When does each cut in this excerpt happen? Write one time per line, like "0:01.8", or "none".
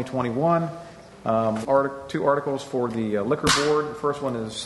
0:01.6